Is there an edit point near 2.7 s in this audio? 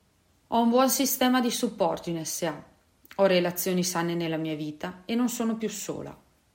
no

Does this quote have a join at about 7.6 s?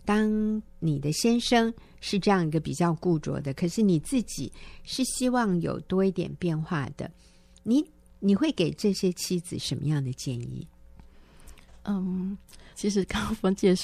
no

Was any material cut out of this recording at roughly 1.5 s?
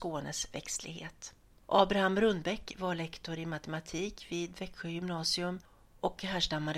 yes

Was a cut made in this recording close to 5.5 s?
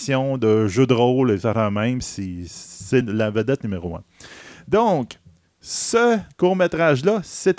no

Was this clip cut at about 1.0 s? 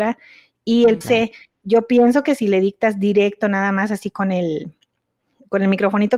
yes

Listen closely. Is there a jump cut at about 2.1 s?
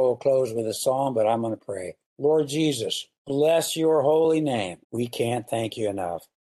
no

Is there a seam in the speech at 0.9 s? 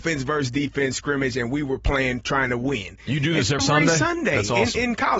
no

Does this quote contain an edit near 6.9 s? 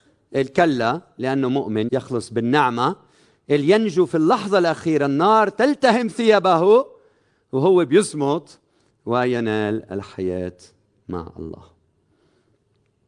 no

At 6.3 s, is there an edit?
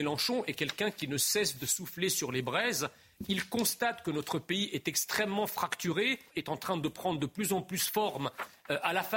yes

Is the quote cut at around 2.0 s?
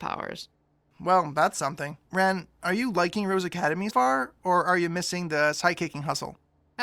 yes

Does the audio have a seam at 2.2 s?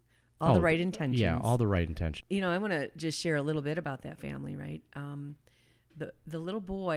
yes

